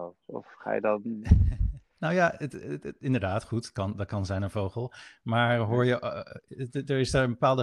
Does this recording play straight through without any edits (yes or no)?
yes